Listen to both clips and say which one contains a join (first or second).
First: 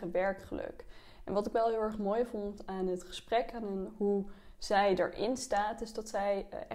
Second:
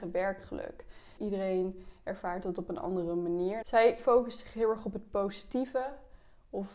second